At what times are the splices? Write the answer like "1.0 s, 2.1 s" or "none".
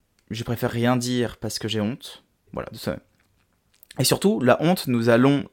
2.5 s

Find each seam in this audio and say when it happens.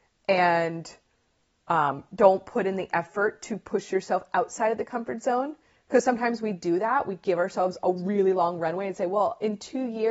none

